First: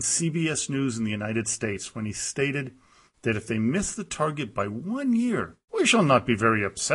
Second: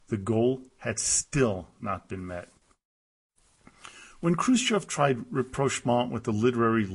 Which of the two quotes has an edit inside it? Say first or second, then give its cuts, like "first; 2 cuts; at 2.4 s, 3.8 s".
first; 1 cut; at 5.6 s